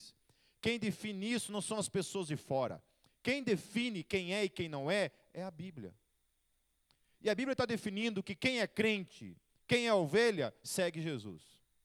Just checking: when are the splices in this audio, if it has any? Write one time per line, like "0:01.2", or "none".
none